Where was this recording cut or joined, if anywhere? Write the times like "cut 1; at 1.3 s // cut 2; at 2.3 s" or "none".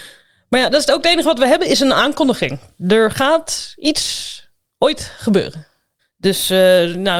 cut 1; at 6.0 s